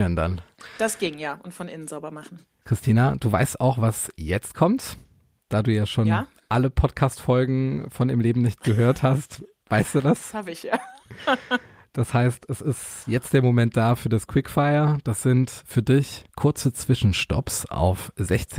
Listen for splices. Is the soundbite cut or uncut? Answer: cut